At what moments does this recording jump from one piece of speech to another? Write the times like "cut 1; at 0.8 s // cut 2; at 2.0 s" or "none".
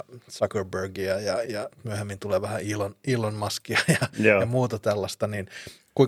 cut 1; at 1.4 s